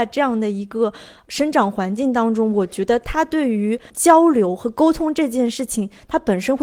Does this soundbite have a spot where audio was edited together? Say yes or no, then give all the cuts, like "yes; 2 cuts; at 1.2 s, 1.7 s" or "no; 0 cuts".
no; 0 cuts